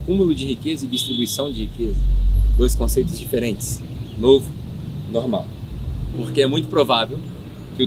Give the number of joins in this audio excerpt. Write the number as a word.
one